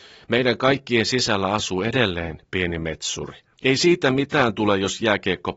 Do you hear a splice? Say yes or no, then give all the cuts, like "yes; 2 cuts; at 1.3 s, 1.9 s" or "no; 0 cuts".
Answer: yes; 1 cut; at 3.6 s